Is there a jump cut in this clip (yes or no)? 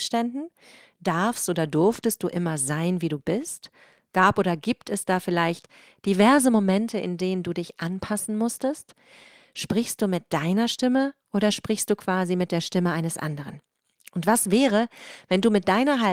no